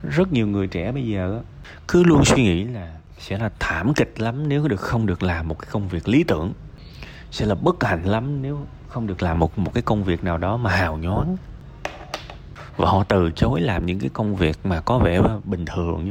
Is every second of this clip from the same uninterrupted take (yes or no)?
yes